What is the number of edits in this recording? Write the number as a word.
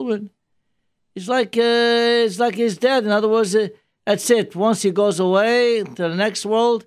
zero